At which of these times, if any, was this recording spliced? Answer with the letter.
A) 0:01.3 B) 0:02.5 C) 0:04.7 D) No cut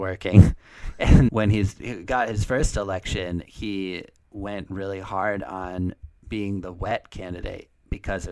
A